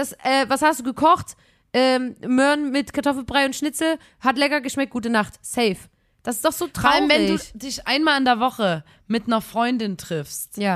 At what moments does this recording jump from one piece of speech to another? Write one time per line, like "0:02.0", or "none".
none